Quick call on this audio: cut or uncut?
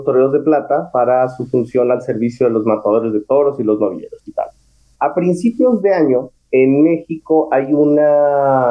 cut